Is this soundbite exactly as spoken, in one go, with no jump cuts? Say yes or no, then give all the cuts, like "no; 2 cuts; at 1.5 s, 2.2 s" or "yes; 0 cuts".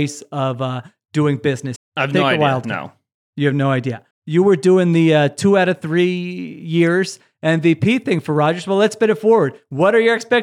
no; 2 cuts; at 1.8 s, 4.1 s